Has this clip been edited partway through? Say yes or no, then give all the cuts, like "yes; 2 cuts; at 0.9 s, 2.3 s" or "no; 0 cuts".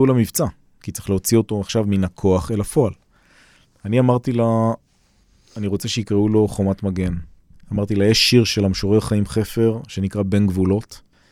no; 0 cuts